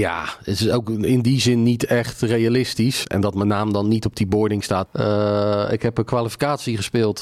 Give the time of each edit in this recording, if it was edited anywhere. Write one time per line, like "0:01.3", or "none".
0:03.0
0:04.9